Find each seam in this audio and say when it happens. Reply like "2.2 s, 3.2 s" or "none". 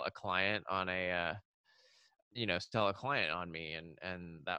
2.2 s